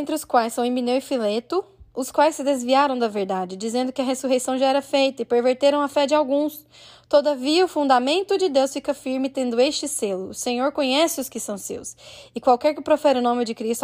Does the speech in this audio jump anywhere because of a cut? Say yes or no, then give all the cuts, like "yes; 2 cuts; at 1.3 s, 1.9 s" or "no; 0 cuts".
no; 0 cuts